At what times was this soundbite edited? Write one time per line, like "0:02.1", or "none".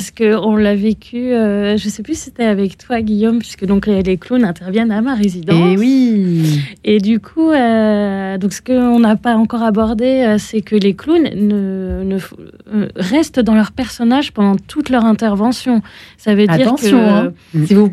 none